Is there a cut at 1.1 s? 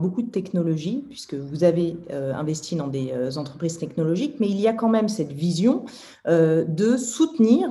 no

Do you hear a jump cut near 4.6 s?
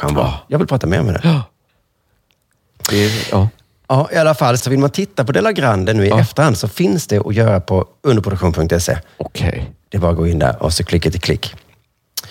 yes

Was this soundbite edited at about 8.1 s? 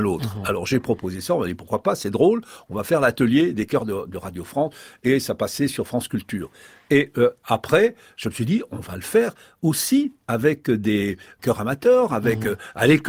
no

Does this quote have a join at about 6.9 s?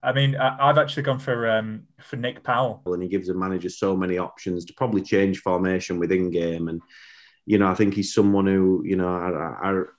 no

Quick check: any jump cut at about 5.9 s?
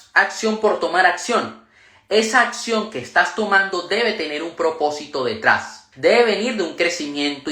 yes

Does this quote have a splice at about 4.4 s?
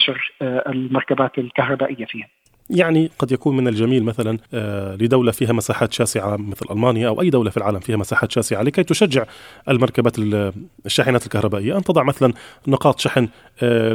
yes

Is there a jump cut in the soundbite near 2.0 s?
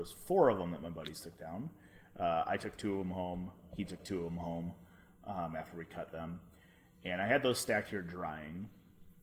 no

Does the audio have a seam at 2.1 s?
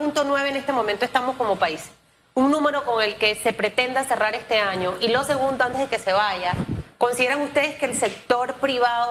no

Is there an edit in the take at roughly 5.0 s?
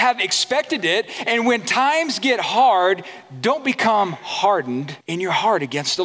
yes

